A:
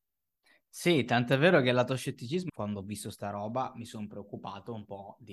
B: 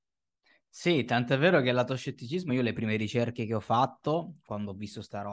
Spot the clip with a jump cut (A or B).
A